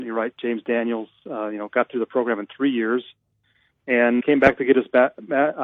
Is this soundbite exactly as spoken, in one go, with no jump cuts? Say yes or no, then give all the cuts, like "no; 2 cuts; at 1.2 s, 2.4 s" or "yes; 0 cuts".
no; 1 cut; at 4.2 s